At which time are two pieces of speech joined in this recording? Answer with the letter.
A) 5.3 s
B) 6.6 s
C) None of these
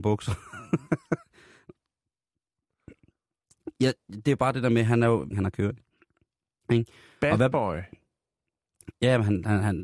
A